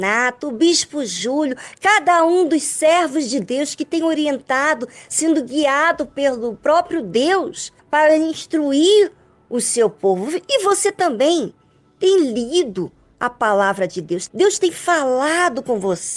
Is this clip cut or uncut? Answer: cut